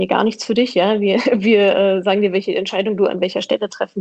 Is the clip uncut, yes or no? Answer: yes